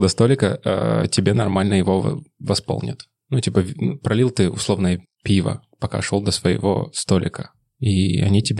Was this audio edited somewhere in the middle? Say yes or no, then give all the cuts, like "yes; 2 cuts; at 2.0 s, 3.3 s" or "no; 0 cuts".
no; 0 cuts